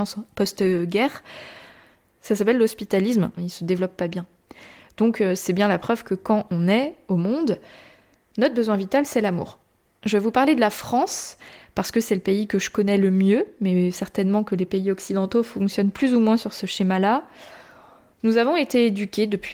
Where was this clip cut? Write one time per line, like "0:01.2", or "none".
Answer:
0:03.4